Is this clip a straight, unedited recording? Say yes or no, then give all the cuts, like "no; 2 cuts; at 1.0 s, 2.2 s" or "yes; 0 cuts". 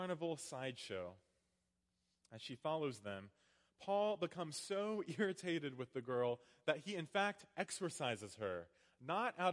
yes; 0 cuts